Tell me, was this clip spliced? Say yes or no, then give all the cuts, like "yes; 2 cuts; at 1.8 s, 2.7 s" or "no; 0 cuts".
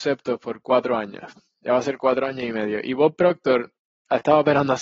no; 0 cuts